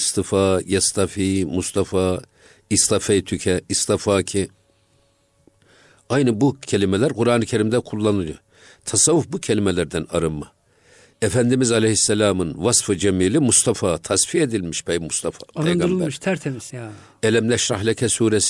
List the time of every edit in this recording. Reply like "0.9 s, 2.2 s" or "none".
16.7 s

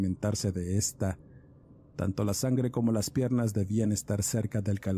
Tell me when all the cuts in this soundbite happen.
none

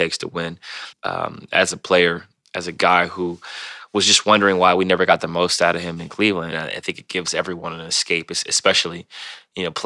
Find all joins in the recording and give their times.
0.9 s, 6.5 s

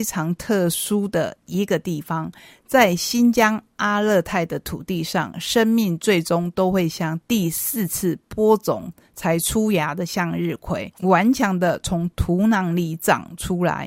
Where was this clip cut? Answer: none

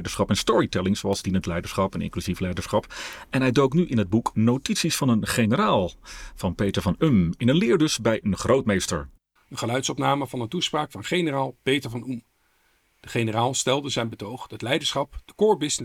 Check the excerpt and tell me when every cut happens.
9.4 s

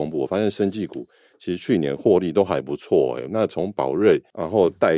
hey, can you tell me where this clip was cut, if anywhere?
none

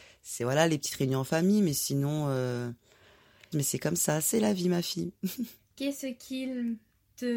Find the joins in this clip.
3.5 s, 5.6 s

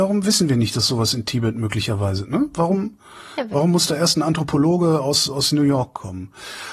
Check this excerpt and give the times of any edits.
none

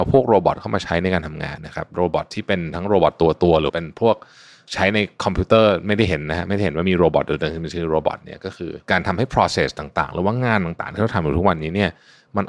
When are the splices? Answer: 1.6 s, 8.8 s

